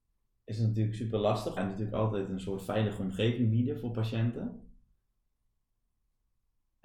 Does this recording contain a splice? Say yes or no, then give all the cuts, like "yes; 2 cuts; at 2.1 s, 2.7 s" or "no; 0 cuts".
yes; 1 cut; at 1.6 s